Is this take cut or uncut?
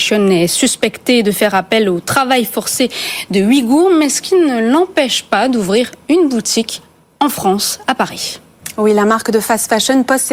uncut